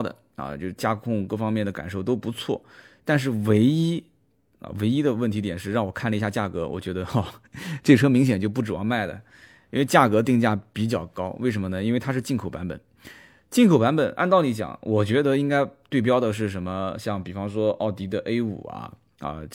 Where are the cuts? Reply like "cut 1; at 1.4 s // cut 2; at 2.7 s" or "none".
none